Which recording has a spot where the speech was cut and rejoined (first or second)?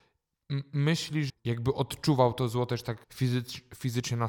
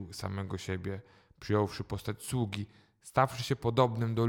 first